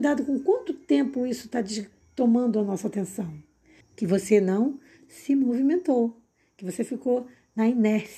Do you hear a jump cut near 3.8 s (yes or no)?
yes